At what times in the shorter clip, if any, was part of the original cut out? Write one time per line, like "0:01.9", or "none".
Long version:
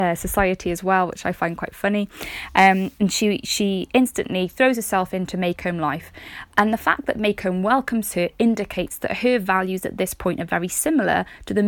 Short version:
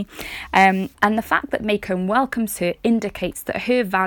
0:00.9